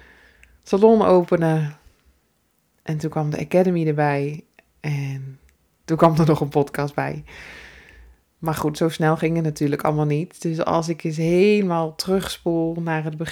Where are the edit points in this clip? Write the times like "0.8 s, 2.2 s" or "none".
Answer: none